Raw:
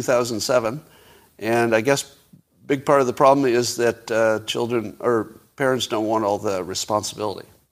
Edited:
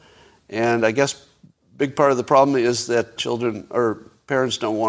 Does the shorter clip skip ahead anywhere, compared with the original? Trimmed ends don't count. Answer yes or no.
yes